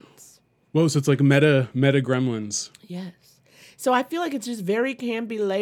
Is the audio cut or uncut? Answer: uncut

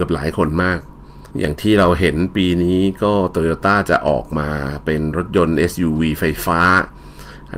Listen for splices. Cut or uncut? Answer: cut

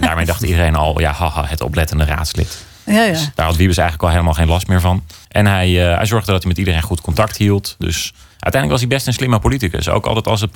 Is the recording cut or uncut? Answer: cut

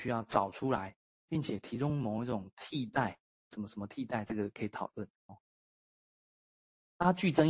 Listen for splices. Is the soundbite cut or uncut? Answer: cut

